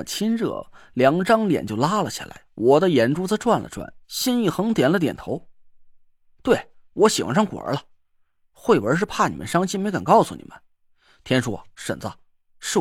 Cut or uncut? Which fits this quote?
cut